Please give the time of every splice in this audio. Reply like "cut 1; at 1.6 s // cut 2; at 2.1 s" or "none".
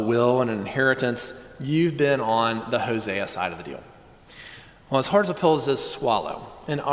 none